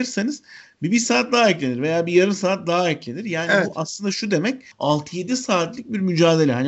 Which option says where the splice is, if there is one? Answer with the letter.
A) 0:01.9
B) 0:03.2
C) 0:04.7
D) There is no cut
C